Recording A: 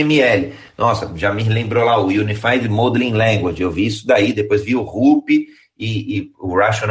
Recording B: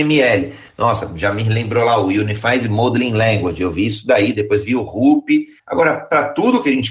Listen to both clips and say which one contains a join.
B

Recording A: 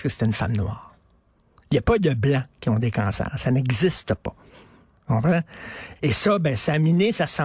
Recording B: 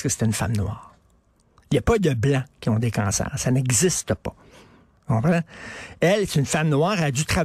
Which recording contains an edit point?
A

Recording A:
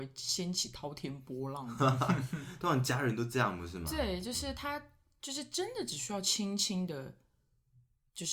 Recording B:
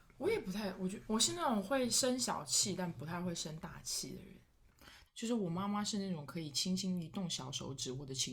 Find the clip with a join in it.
B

